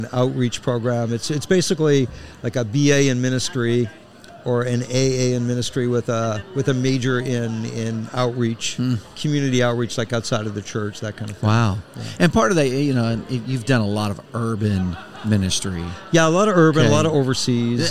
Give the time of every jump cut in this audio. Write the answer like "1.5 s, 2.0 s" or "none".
none